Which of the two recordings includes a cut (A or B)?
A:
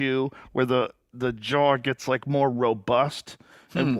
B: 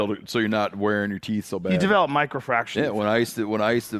B